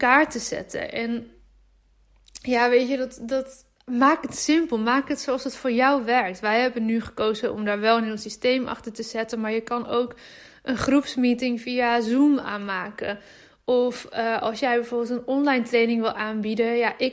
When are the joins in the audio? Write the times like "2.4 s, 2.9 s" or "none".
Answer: none